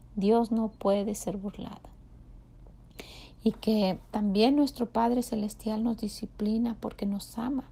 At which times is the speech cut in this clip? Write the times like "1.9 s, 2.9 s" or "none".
none